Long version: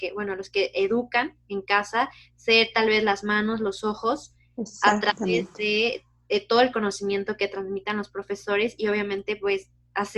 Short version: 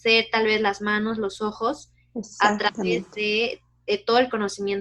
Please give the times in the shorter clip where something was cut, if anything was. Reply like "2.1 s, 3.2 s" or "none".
none